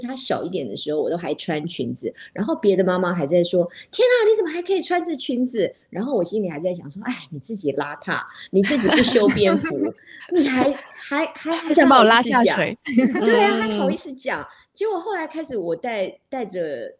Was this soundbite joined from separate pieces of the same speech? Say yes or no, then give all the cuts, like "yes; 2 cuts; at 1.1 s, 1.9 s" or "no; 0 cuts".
no; 0 cuts